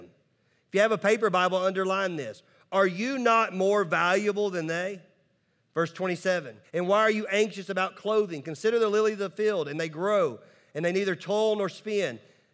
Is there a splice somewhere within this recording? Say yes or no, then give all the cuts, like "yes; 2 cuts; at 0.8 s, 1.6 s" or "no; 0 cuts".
yes; 1 cut; at 6.6 s